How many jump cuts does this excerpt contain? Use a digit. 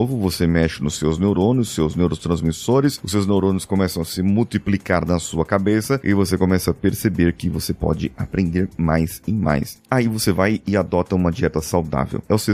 0